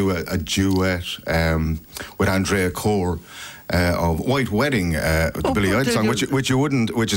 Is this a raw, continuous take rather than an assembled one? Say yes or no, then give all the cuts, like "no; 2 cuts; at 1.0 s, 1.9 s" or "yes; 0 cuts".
yes; 0 cuts